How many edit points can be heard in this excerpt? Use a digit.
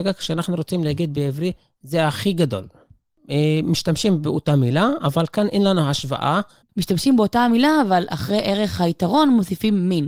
1